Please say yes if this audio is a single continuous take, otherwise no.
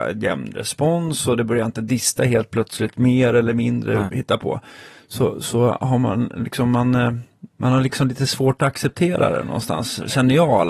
no